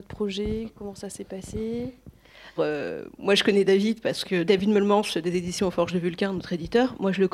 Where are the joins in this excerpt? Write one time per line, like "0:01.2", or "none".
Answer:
0:02.6
0:04.5